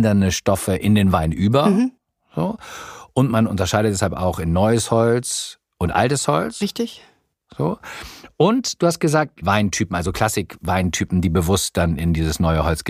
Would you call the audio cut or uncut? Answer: cut